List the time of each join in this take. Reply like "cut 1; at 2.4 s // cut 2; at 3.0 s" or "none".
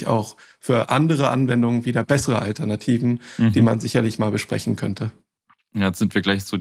none